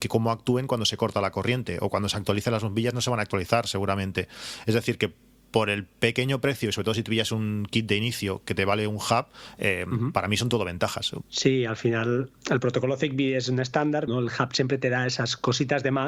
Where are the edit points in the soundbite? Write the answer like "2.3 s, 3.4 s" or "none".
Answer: 11.2 s, 14.1 s